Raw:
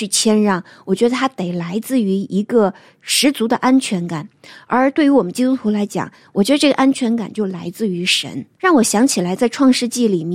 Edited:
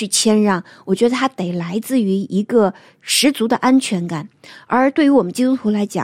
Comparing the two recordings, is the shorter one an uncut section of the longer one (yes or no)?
yes